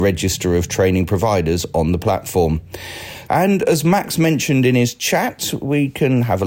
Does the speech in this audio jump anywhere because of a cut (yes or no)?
yes